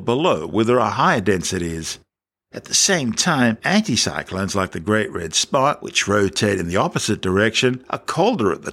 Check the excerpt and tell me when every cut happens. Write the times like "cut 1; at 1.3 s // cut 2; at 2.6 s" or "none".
none